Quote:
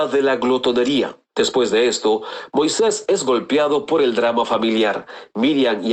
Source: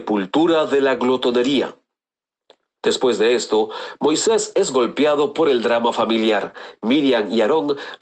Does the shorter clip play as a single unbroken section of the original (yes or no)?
no